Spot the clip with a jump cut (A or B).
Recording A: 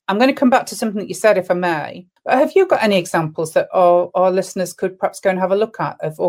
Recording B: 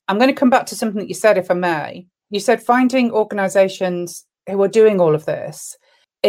A